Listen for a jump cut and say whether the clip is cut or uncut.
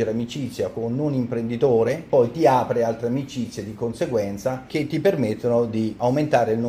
cut